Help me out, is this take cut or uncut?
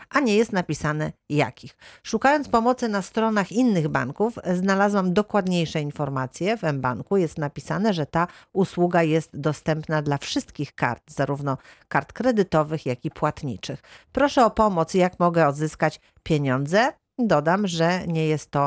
uncut